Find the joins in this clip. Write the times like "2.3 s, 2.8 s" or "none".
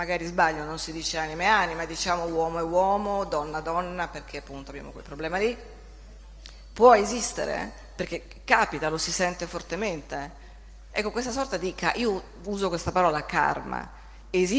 10.9 s